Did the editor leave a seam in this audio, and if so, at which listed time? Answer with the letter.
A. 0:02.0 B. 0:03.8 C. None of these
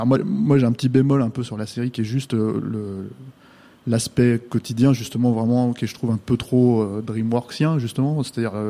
C